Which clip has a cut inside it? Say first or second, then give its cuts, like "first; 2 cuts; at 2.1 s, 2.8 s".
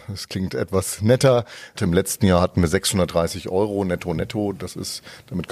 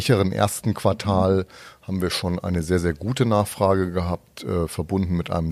first; 1 cut; at 1.8 s